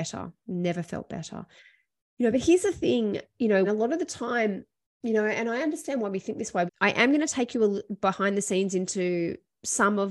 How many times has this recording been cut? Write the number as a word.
two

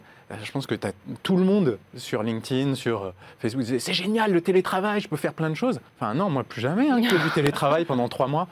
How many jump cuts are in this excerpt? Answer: one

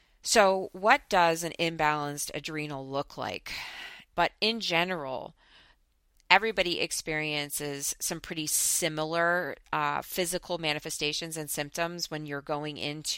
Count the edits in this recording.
one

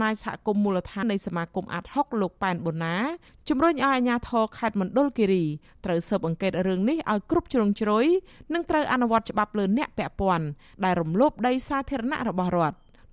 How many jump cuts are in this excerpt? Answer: one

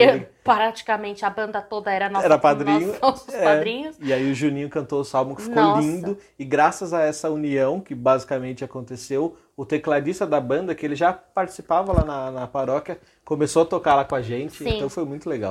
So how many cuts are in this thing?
zero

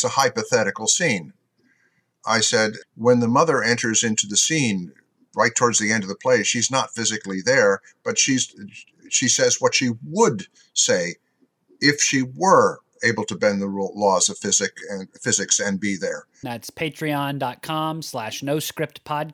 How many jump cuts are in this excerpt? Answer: two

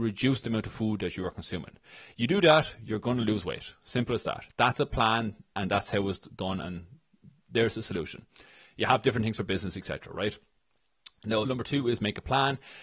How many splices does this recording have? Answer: one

